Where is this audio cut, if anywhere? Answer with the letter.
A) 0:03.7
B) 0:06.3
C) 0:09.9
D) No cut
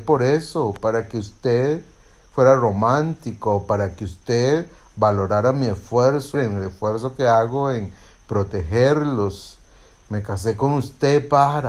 B